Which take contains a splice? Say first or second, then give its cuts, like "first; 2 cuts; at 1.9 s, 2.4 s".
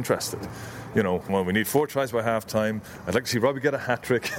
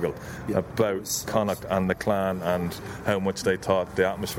first; 1 cut; at 1.3 s